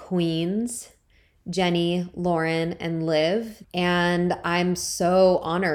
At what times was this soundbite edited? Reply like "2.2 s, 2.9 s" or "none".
3.6 s